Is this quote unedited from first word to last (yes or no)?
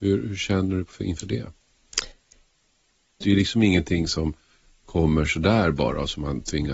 no